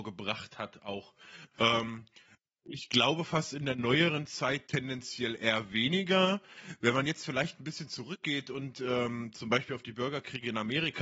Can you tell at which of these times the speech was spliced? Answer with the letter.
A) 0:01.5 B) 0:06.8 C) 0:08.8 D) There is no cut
D